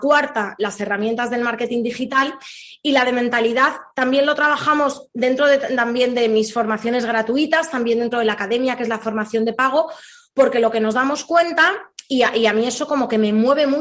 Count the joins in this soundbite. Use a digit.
0